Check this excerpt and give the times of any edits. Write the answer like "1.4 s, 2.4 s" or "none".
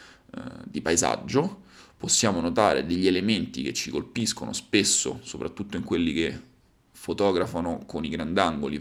none

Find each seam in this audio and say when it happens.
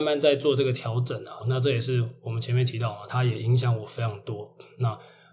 1.4 s, 3.1 s

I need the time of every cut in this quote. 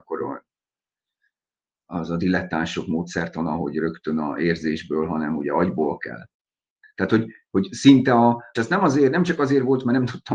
6.8 s, 8.6 s

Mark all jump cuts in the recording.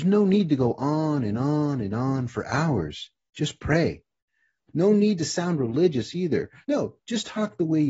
4.7 s, 6.6 s

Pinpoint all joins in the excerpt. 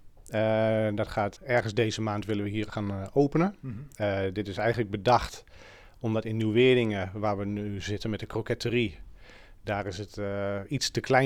1.4 s

